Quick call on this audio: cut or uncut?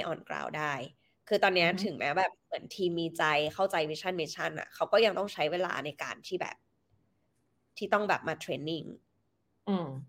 uncut